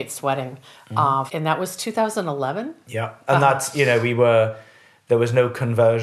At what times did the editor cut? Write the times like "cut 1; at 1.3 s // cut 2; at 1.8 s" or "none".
cut 1; at 1.3 s // cut 2; at 3.3 s